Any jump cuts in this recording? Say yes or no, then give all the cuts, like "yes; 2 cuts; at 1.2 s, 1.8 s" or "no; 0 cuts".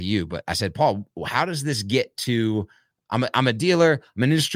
no; 0 cuts